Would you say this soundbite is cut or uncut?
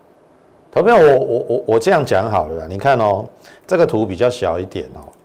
cut